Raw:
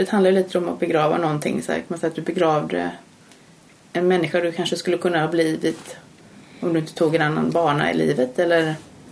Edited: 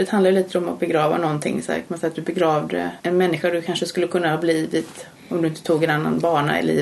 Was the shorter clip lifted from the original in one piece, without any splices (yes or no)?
no